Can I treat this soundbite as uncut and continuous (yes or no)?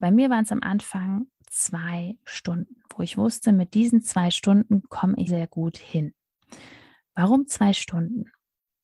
no